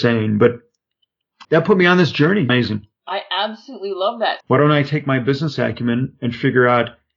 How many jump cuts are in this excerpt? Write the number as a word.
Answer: three